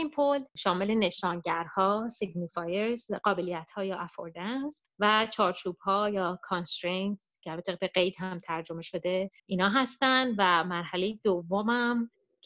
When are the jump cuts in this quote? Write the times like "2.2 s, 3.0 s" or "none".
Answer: 9.4 s